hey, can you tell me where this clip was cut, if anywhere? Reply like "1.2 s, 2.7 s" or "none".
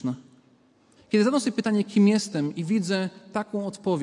1.0 s

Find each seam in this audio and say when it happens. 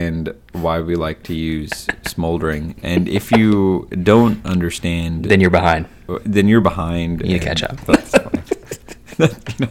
7.8 s

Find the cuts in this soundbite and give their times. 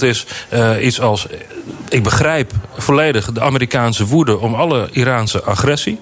none

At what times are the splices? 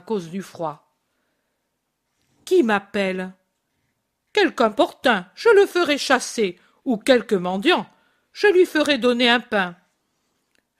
none

